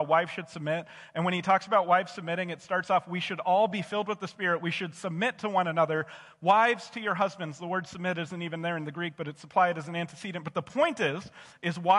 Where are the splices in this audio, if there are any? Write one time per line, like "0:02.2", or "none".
none